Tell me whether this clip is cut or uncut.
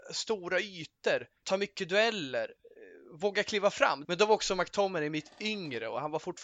cut